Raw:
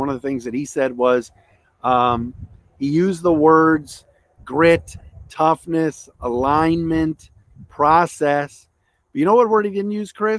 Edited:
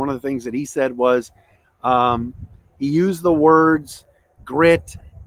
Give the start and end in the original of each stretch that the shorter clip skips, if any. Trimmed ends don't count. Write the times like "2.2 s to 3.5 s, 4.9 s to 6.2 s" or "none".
none